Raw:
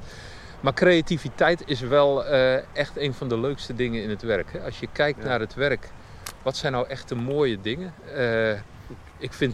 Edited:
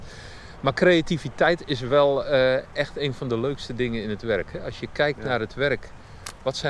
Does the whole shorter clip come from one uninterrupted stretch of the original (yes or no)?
yes